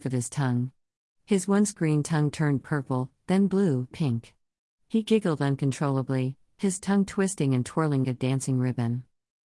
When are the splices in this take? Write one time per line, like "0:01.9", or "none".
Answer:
0:03.9
0:08.0